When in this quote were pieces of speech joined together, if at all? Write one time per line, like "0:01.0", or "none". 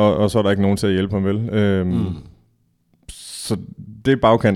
none